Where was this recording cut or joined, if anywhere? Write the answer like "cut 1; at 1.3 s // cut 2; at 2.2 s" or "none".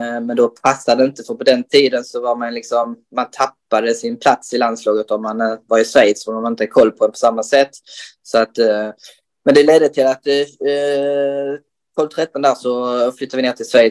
none